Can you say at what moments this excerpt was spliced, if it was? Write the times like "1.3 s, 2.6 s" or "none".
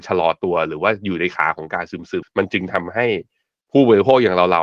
2.2 s